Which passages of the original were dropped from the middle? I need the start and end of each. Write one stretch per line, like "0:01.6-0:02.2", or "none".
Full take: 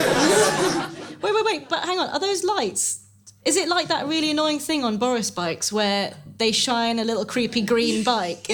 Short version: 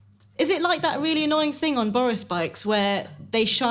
none